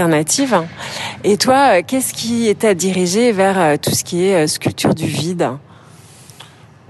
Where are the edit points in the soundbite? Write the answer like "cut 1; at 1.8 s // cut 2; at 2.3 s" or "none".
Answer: none